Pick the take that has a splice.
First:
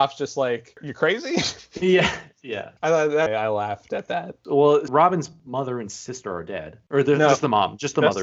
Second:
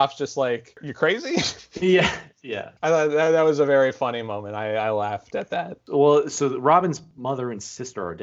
first; 2 cuts; at 3.3 s, 4.9 s

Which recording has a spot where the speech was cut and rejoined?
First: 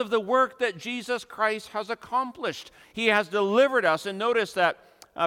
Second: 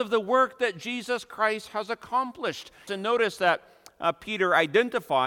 second; 1 cut; at 2.9 s

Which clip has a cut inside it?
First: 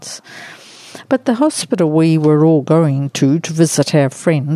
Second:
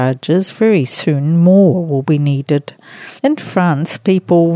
second; 1 cut; at 3.2 s

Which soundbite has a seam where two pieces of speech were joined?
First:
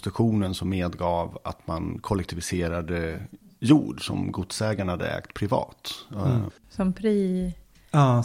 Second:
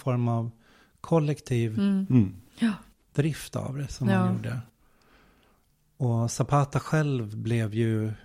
first; 1 cut; at 6.5 s

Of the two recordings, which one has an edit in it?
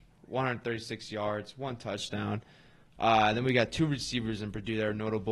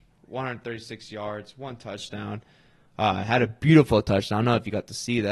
first; 1 cut; at 2.8 s

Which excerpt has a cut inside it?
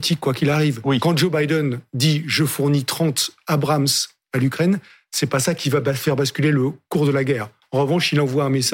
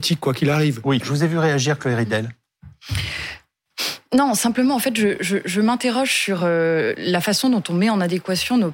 second; 1 cut; at 1.0 s

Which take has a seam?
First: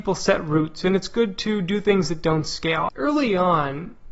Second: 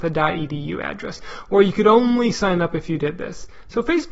first; 1 cut; at 2.9 s

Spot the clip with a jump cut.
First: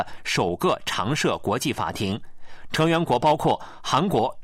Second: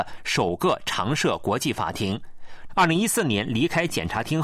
second; 1 cut; at 2.7 s

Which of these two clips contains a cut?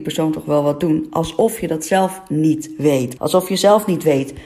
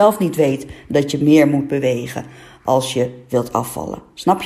first; 1 cut; at 3.2 s

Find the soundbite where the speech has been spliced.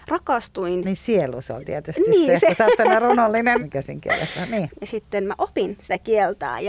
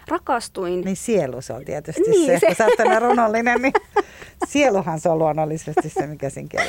first; 2 cuts; at 3.6 s, 4.7 s

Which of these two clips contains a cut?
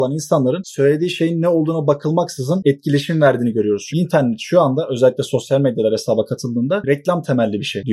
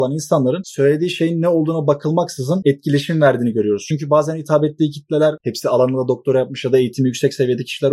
first; 1 cut; at 3.9 s

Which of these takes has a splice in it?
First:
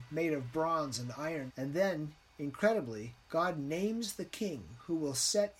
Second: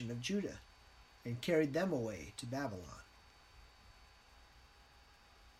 first; 2 cuts; at 1.5 s, 3.2 s

